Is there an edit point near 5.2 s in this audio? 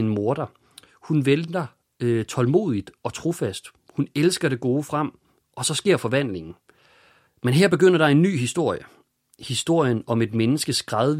no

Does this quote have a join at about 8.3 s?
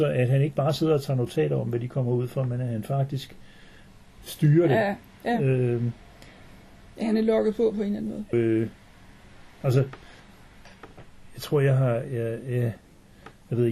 yes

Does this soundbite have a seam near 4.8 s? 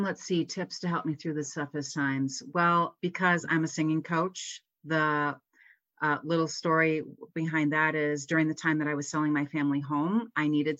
no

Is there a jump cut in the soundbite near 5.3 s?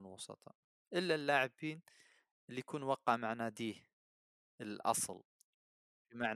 no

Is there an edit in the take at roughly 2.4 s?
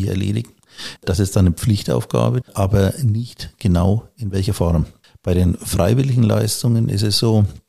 yes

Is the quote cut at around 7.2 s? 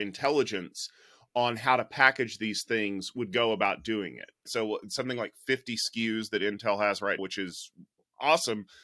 yes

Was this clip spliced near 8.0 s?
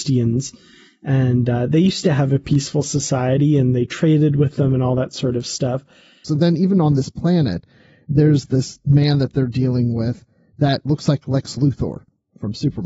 no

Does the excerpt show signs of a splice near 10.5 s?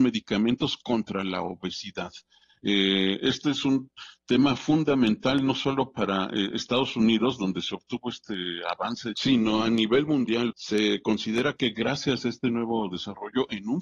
yes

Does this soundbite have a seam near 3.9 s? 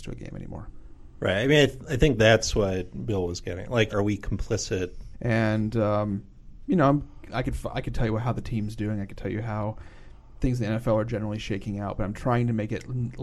yes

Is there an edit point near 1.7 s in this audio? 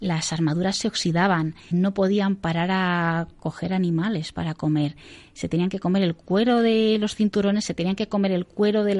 yes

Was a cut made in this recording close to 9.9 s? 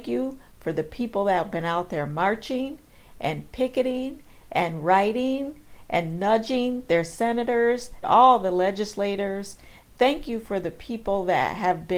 no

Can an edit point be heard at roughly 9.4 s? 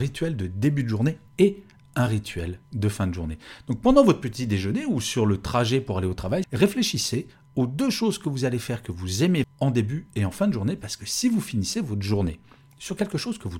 yes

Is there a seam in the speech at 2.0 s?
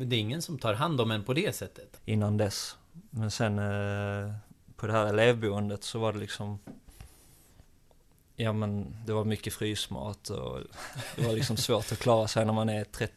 yes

